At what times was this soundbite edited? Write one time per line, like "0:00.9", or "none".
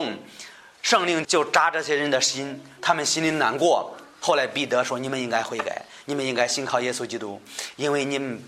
0:01.2